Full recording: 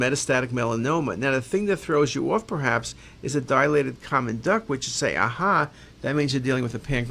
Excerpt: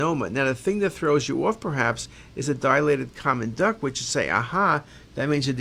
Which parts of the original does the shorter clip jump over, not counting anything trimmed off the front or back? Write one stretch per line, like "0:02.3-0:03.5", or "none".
none